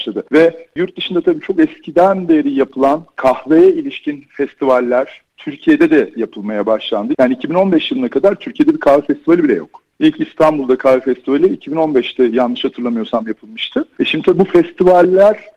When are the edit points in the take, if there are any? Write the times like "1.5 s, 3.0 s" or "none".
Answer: 7.1 s